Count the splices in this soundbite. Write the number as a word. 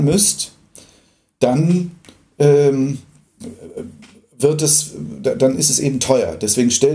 zero